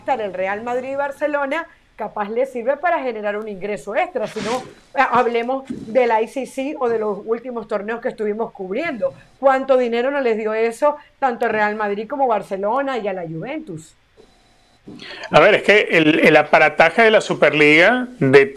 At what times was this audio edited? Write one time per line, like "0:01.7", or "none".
none